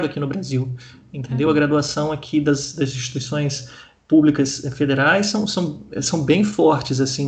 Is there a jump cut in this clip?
no; 0 cuts

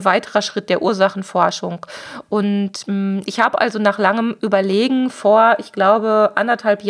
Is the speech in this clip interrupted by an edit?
no; 0 cuts

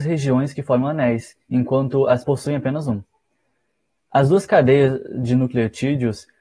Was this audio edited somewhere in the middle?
yes; 1 cut; at 2.2 s

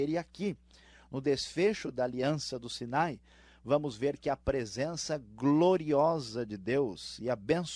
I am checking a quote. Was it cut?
no; 0 cuts

